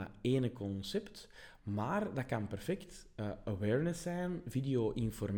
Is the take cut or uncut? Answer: uncut